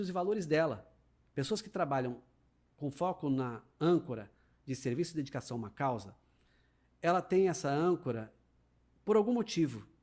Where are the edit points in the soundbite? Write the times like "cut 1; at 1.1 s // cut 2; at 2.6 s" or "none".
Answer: cut 1; at 1.2 s